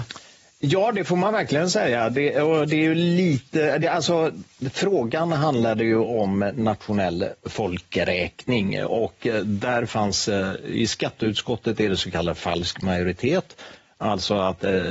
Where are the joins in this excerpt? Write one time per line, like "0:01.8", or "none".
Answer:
none